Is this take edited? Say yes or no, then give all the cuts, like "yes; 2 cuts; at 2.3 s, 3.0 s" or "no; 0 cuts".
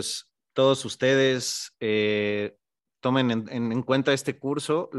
no; 0 cuts